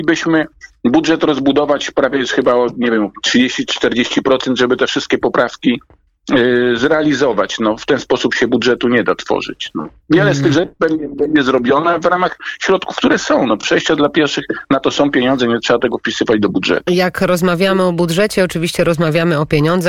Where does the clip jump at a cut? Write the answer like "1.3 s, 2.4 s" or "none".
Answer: none